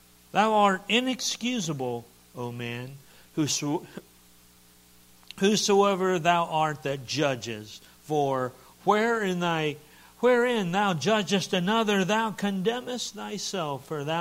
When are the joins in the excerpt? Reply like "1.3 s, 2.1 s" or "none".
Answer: none